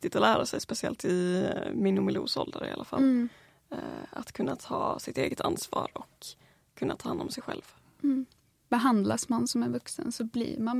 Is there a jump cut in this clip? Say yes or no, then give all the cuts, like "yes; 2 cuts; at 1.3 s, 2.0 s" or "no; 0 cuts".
no; 0 cuts